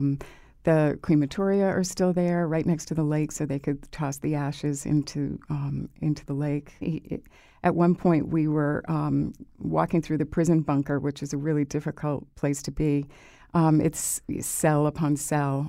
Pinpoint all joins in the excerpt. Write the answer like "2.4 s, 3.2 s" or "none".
6.8 s

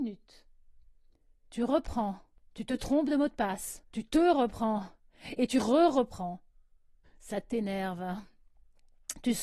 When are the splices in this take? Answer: 3.9 s, 7.0 s

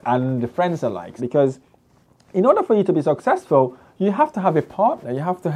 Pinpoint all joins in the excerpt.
1.2 s

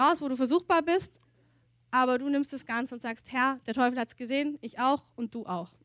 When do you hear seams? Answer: none

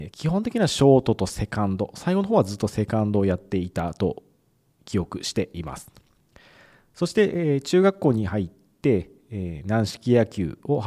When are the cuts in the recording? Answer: none

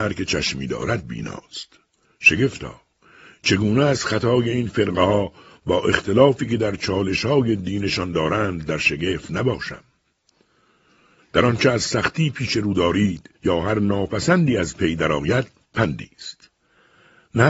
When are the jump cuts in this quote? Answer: 11.2 s, 13.4 s

